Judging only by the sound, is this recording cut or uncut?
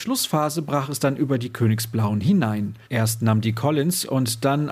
cut